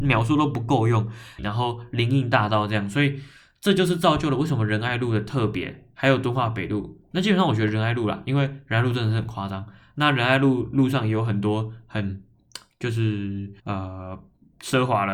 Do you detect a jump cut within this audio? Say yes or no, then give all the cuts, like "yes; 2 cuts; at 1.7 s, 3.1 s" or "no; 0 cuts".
yes; 2 cuts; at 1.4 s, 13.6 s